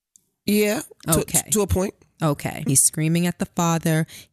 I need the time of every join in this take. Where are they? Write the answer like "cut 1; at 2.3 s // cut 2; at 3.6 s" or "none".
cut 1; at 2.7 s